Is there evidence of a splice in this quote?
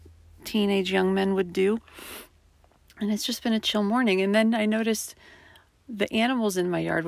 no; 0 cuts

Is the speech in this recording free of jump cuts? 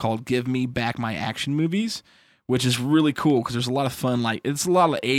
yes; 0 cuts

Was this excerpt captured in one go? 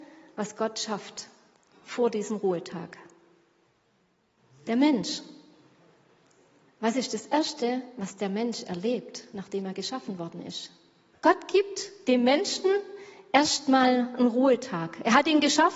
no; 1 cut; at 11.1 s

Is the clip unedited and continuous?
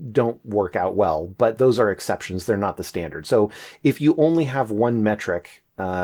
yes; 0 cuts

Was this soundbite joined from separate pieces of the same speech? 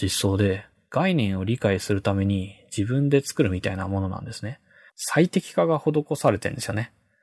yes; 1 cut; at 4.9 s

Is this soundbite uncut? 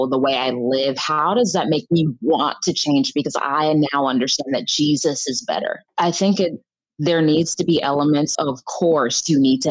no; 2 cuts; at 5.9 s, 8.4 s

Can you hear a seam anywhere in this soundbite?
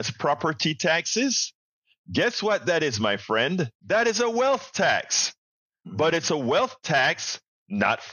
yes; 1 cut; at 3.8 s

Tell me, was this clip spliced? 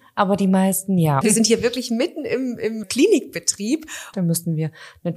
yes; 3 cuts; at 1.2 s, 2.8 s, 4.1 s

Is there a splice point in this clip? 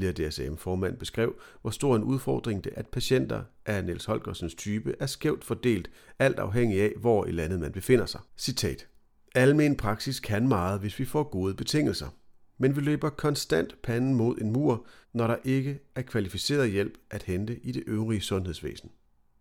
yes; 3 cuts; at 2.7 s, 8.3 s, 15.0 s

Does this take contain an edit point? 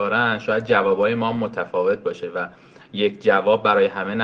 no; 0 cuts

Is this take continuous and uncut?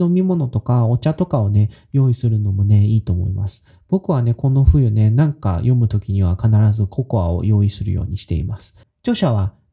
no; 1 cut; at 8.8 s

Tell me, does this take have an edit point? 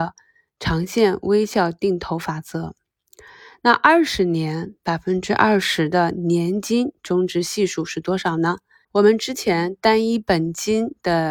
yes; 1 cut; at 8.8 s

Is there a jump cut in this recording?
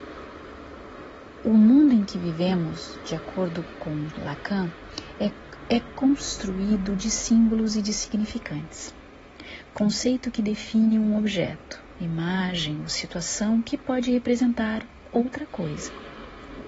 no; 0 cuts

